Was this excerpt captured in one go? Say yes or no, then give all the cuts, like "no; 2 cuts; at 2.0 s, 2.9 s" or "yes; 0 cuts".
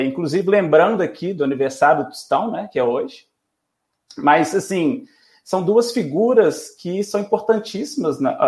yes; 0 cuts